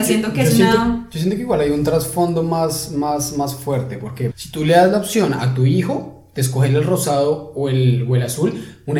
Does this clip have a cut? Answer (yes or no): yes